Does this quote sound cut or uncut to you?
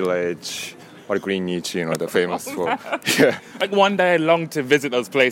uncut